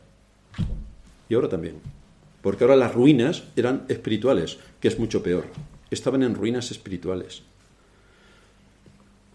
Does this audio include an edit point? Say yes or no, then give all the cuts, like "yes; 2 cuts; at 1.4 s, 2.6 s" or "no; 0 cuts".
no; 0 cuts